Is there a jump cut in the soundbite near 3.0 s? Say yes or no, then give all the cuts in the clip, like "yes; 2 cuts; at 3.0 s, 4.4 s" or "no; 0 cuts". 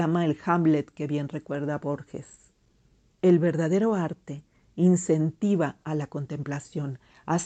yes; 1 cut; at 3.0 s